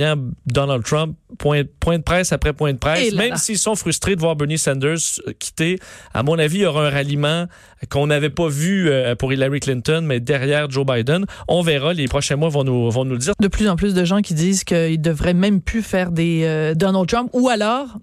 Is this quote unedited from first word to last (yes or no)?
no